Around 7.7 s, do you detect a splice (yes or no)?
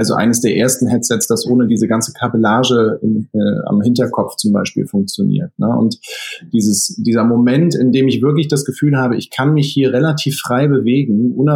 no